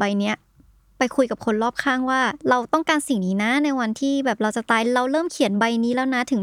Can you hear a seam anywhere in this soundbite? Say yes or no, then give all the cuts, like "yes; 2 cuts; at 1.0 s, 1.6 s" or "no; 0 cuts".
yes; 1 cut; at 2.4 s